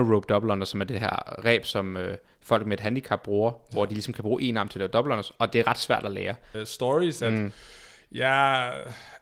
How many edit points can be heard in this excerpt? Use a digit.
1